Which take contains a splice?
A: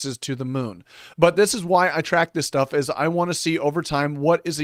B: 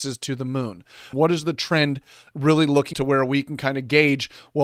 B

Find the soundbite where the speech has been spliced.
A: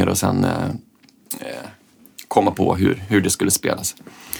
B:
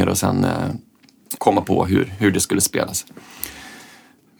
B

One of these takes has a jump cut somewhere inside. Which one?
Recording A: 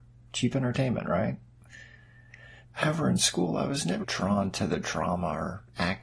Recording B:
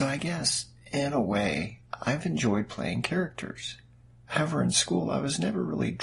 A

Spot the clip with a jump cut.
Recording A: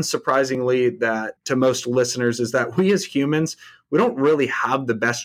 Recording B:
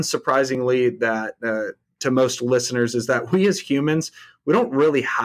A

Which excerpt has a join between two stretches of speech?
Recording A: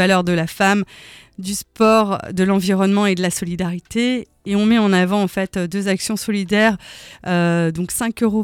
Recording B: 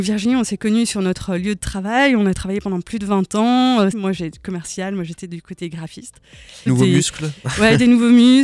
B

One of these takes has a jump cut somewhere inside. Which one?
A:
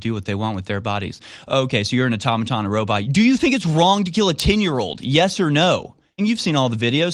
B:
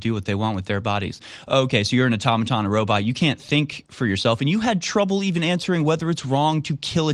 A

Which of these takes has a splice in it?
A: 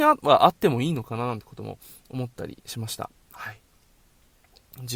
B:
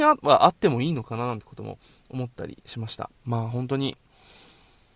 B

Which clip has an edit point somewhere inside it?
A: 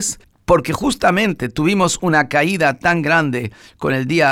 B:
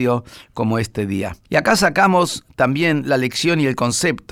B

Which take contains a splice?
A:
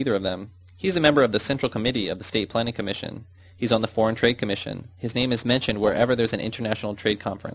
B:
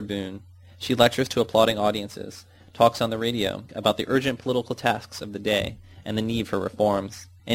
B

